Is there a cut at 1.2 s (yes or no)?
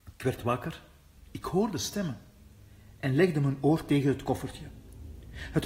yes